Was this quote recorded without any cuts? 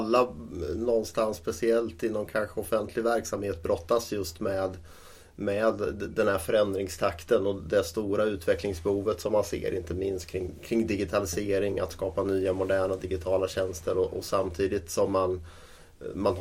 yes; 0 cuts

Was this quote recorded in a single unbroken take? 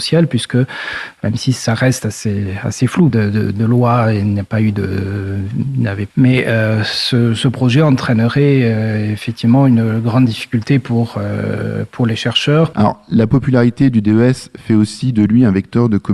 no; 3 cuts; at 3.1 s, 6.1 s, 12.7 s

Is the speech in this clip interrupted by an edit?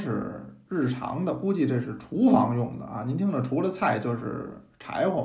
no; 0 cuts

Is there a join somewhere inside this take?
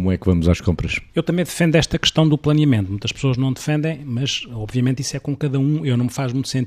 no; 0 cuts

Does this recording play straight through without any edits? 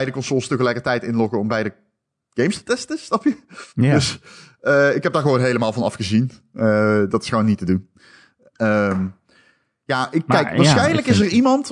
yes; 0 cuts

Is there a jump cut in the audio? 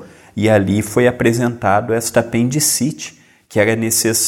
no; 0 cuts

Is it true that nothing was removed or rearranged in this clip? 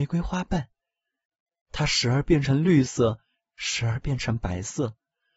yes; 0 cuts

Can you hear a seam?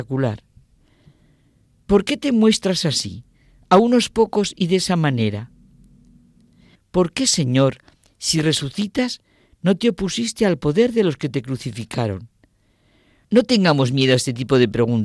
yes; 2 cuts; at 6.7 s, 13.2 s

